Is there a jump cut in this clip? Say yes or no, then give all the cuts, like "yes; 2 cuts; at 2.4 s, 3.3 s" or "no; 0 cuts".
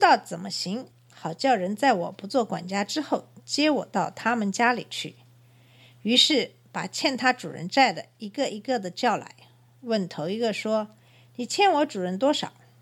no; 0 cuts